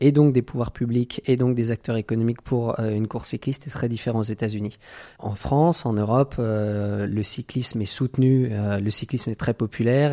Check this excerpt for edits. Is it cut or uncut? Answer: uncut